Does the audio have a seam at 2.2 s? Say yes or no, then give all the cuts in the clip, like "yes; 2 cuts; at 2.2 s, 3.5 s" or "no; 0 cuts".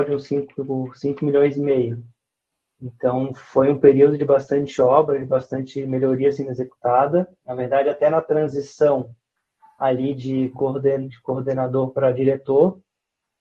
no; 2 cuts; at 7.4 s, 11.1 s